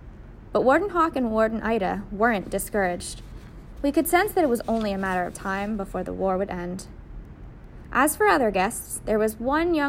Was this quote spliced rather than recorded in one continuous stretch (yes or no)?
yes